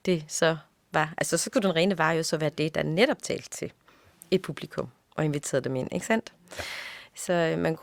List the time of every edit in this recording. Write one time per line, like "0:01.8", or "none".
none